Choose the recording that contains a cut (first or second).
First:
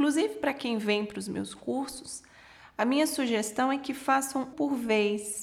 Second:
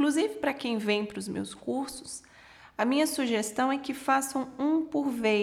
first